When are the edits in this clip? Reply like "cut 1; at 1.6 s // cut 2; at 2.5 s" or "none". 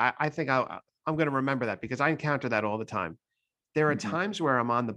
cut 1; at 3.6 s